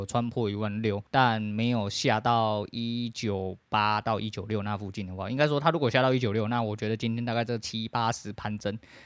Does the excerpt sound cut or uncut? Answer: cut